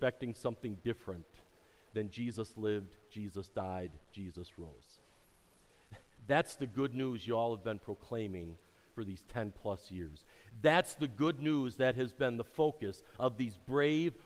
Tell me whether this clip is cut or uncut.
uncut